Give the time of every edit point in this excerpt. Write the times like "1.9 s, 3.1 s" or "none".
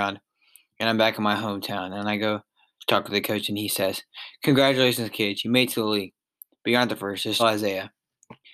7.4 s